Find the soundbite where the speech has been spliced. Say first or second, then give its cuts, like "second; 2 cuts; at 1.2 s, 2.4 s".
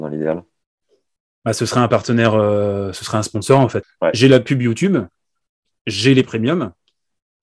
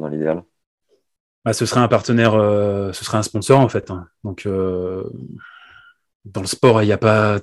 first; 1 cut; at 3.8 s